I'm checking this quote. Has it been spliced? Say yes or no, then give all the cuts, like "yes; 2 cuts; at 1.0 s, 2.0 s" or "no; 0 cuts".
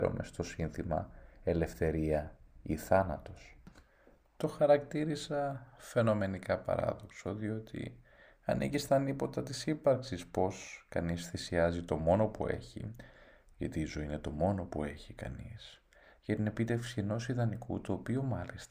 yes; 1 cut; at 13.5 s